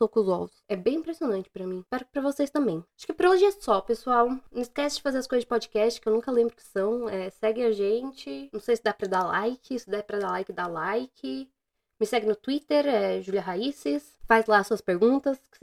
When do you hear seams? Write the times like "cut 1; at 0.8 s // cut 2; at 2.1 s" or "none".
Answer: none